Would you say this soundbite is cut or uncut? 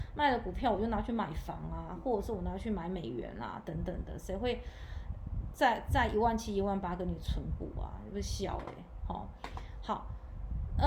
uncut